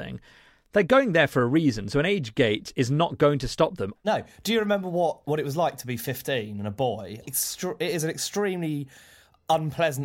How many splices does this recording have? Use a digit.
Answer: 2